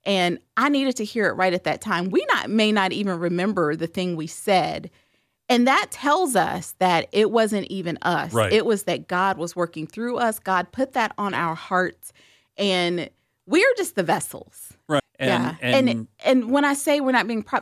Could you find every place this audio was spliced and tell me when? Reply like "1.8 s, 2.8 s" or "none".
15.0 s